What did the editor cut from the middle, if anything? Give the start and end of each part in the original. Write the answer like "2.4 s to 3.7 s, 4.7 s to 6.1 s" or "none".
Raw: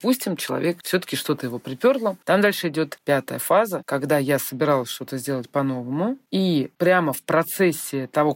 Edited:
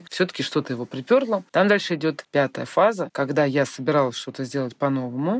none